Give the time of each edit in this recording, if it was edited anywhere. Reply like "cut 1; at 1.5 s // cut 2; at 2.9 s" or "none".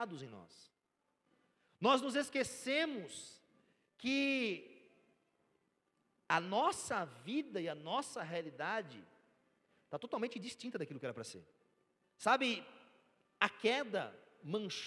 cut 1; at 12.0 s